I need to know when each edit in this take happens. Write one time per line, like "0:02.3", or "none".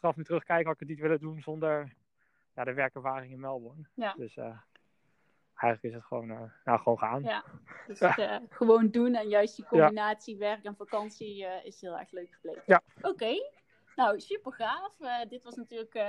0:12.9